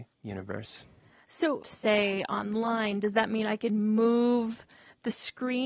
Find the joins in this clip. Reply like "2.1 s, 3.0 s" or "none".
1.6 s